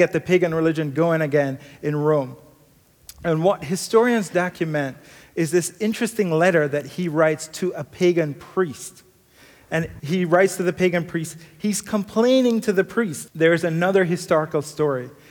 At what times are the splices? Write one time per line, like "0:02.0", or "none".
0:10.0
0:13.3